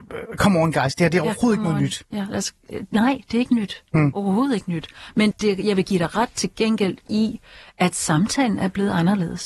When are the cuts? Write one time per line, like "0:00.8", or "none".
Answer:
0:05.3